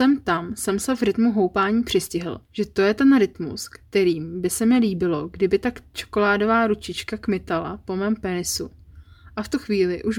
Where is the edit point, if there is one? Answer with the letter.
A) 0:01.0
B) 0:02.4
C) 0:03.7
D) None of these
B